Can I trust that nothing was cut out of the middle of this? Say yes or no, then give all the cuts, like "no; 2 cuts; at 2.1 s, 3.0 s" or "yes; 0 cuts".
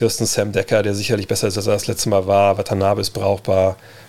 yes; 0 cuts